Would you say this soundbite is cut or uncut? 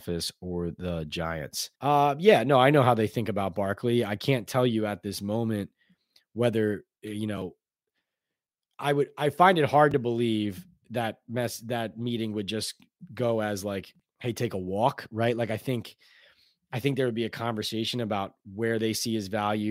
cut